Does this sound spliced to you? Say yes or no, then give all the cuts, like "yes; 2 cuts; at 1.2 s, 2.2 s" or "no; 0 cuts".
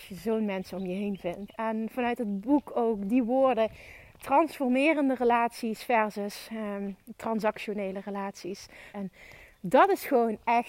yes; 2 cuts; at 1.5 s, 8.9 s